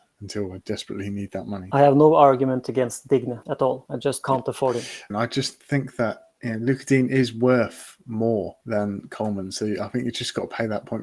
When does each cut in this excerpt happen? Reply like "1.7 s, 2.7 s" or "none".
5.1 s

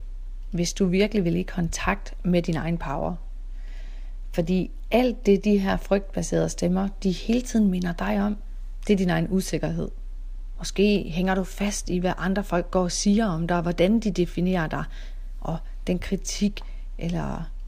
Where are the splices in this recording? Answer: 10.5 s

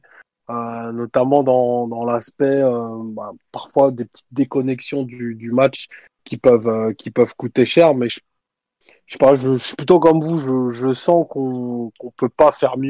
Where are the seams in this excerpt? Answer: none

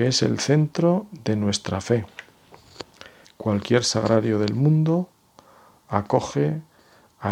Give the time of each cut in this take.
3.2 s

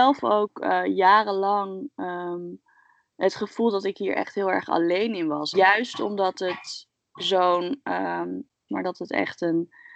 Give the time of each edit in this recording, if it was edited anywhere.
5.5 s, 8.7 s

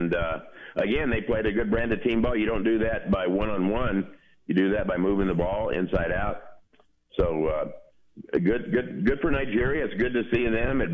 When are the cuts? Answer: none

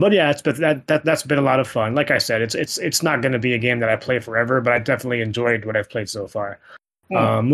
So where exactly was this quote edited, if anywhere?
none

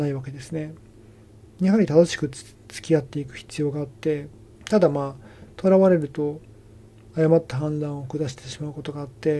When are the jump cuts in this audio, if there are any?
4.5 s

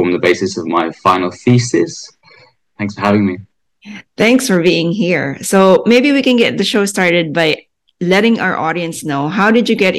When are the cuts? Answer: 2.8 s

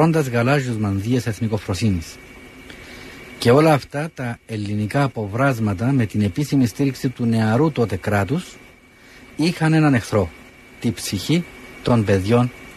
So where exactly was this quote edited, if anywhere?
none

